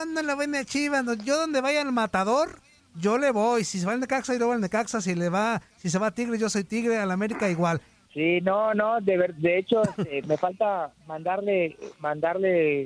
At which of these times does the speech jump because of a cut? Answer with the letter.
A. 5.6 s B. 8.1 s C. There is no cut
B